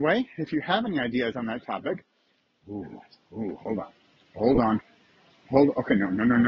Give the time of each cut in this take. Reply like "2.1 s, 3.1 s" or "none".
none